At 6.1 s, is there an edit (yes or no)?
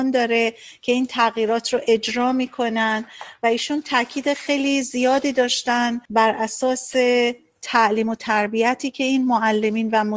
yes